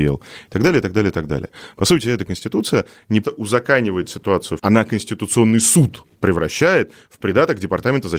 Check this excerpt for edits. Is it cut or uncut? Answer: cut